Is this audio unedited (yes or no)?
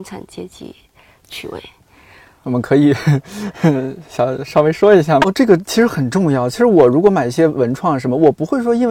no